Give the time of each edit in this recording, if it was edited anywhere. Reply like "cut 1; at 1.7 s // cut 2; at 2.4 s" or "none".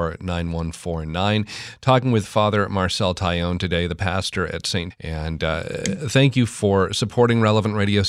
cut 1; at 4.9 s